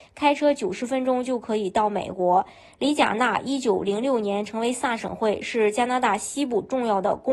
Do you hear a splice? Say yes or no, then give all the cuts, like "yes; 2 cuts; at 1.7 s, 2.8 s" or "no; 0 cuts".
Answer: yes; 1 cut; at 5.0 s